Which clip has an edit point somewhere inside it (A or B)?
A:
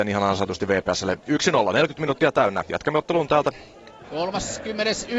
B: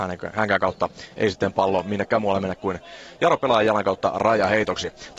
A